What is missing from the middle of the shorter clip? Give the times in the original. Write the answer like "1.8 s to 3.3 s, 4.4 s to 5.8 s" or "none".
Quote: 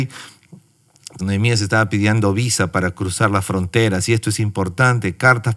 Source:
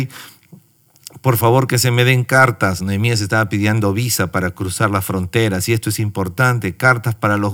1.2 s to 2.8 s